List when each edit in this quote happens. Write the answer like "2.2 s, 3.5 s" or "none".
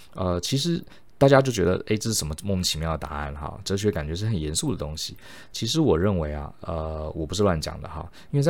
none